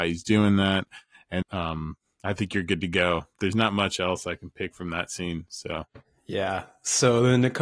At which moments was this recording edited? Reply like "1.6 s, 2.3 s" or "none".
1.4 s